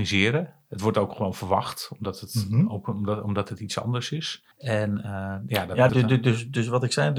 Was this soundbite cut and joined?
yes; 2 cuts; at 4.5 s, 5.9 s

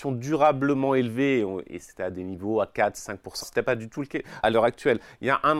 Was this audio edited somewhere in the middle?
yes; 2 cuts; at 3.4 s, 4.4 s

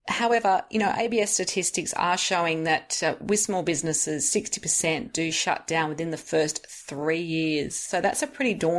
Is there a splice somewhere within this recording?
no; 0 cuts

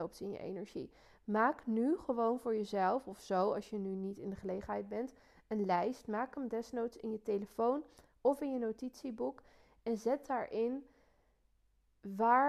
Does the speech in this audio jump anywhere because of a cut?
no; 0 cuts

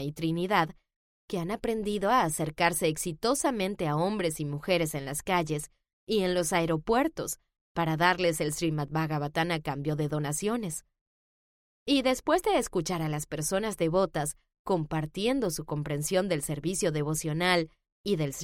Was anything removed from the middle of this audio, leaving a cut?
no; 0 cuts

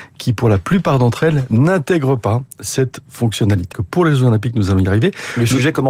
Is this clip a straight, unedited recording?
no; 1 cut; at 3.7 s

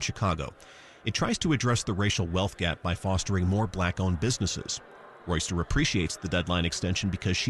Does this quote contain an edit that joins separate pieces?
no; 0 cuts

